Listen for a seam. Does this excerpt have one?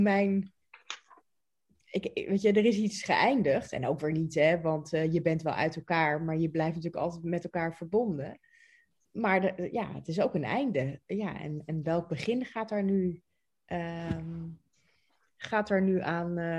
no; 0 cuts

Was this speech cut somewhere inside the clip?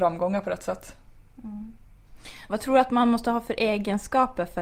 yes; 1 cut; at 2.5 s

